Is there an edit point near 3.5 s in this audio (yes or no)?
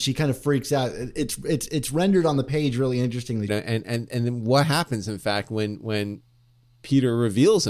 yes